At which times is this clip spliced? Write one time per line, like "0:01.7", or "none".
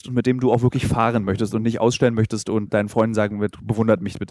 0:02.7